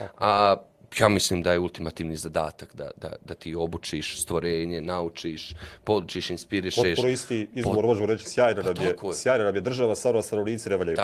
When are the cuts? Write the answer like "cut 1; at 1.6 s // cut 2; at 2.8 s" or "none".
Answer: cut 1; at 2.9 s